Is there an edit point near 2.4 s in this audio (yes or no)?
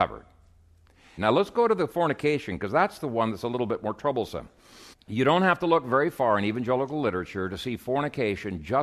no